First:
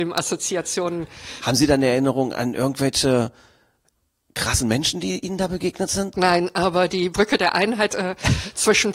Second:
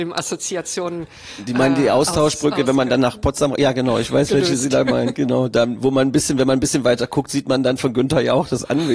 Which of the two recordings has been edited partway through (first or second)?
first